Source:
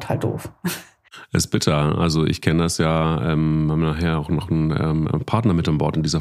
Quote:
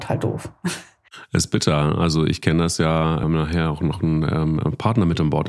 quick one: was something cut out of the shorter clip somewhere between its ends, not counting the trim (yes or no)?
yes